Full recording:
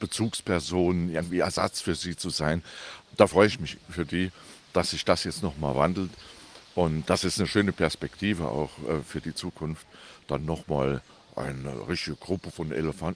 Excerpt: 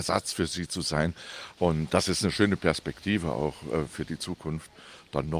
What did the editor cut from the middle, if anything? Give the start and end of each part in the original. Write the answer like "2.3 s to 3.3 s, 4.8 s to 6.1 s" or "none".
3.1 s to 6.7 s